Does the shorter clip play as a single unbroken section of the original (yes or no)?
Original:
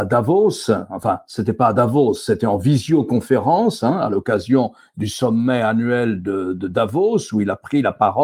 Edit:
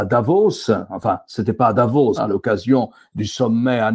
no